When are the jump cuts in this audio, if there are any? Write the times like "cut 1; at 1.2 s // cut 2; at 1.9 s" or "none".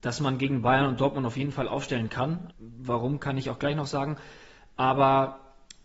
cut 1; at 2.5 s